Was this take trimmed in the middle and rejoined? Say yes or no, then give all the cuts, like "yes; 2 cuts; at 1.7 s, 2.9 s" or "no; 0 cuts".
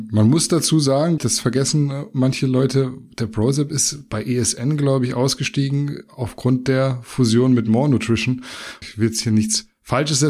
yes; 2 cuts; at 1.2 s, 8.8 s